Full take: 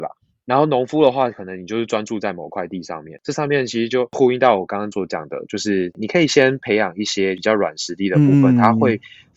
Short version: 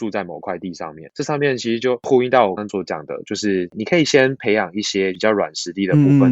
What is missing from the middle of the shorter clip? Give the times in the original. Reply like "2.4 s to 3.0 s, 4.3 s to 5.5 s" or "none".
4.7 s to 4.8 s

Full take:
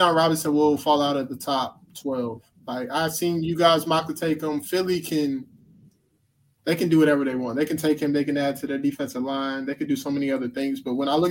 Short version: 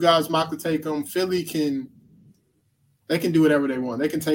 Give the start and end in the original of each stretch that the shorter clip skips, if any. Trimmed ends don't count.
none

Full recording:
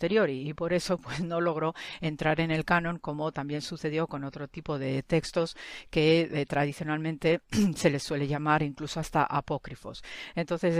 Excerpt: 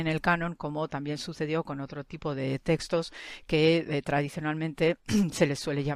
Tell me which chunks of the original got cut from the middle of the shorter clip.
none

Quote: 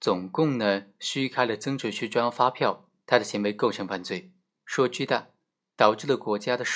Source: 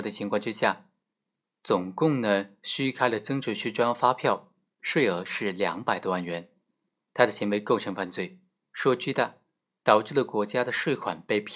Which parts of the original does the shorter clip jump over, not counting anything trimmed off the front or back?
4.7 s to 7.1 s

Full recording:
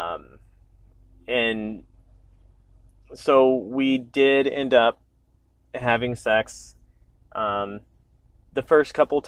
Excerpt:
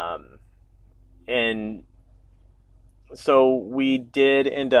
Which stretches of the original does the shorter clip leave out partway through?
none

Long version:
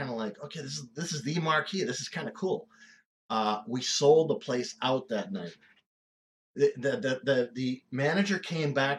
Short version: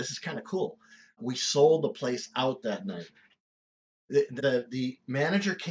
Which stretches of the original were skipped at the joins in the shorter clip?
3.1 s to 3.6 s, 6.8 s to 7.2 s

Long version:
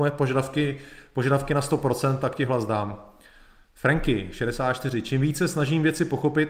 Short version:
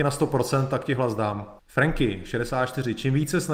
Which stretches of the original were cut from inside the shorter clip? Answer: 3.1 s to 3.6 s

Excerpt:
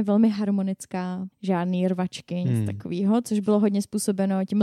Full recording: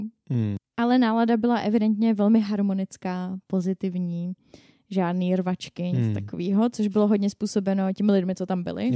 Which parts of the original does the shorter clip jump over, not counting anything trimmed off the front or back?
3.4 s to 4.8 s

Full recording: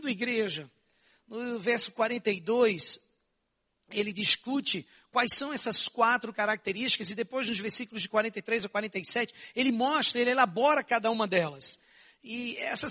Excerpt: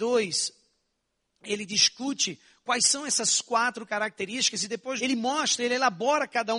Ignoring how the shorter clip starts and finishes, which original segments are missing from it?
7.4 s to 9.5 s

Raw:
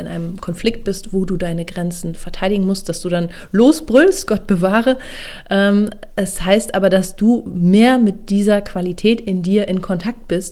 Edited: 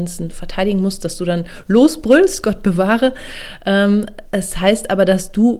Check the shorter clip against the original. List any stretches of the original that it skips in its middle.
none

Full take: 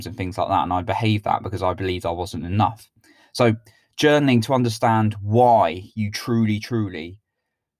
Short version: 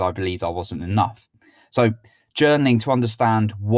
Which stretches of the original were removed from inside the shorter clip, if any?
none

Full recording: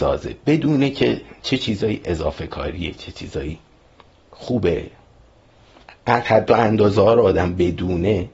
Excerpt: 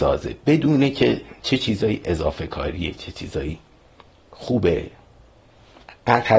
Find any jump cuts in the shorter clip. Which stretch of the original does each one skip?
none

